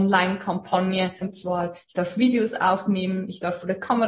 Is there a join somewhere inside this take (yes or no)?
yes